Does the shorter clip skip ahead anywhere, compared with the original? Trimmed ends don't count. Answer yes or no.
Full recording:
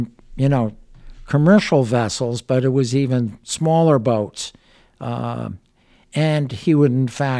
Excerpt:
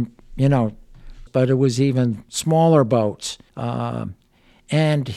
yes